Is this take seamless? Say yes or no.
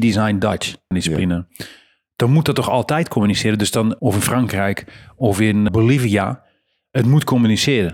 no